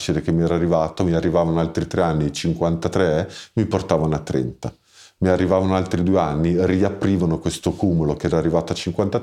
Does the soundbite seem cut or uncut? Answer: uncut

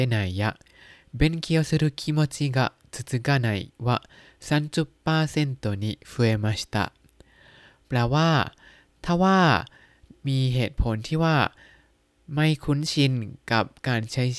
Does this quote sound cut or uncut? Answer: uncut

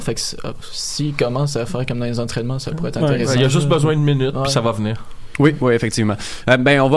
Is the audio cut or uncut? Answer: uncut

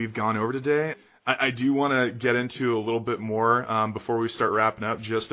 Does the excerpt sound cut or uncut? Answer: cut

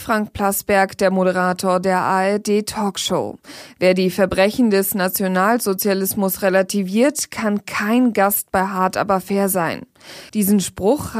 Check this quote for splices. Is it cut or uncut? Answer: cut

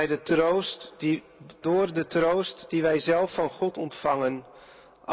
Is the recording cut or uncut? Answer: cut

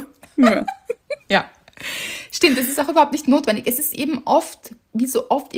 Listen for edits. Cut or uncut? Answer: uncut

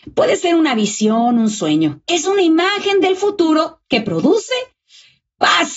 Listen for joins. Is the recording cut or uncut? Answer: cut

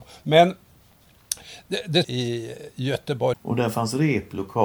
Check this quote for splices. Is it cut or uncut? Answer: cut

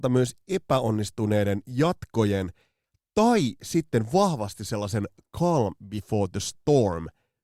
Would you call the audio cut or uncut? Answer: uncut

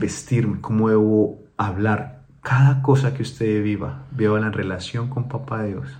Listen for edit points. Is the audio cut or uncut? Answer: uncut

